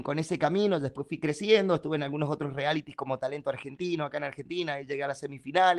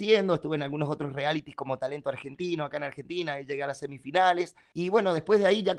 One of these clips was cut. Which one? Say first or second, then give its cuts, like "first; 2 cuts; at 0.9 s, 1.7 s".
second; 1 cut; at 4.7 s